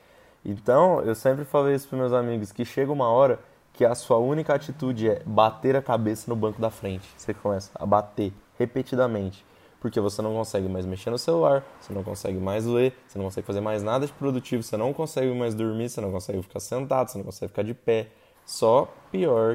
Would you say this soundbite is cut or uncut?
cut